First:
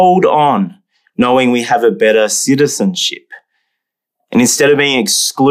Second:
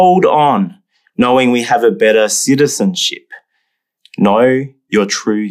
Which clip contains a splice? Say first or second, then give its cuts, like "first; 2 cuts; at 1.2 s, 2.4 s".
second; 1 cut; at 4.0 s